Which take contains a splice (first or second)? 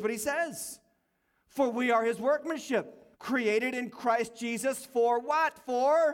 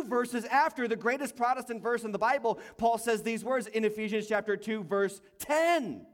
first